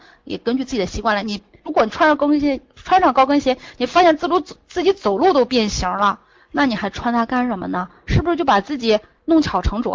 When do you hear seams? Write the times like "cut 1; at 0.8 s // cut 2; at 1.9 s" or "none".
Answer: none